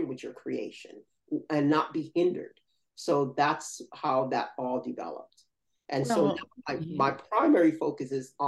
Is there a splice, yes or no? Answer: no